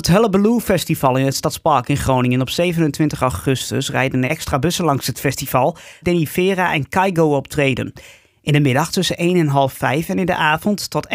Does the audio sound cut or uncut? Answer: cut